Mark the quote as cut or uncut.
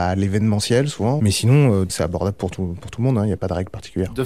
cut